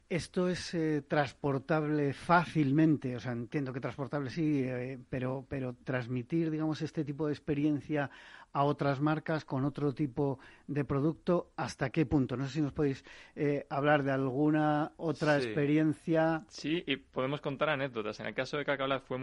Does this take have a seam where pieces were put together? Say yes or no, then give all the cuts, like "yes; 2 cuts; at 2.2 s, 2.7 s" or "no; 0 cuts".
no; 0 cuts